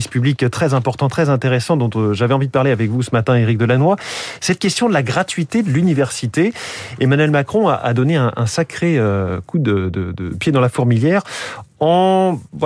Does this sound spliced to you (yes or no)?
no